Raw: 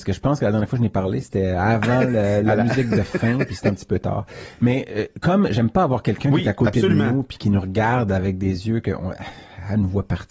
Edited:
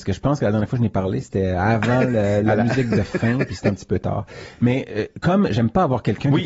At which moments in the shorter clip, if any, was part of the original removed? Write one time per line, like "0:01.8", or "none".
none